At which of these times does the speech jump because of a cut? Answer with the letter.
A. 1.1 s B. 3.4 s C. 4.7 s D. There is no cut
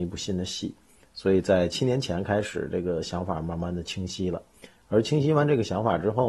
D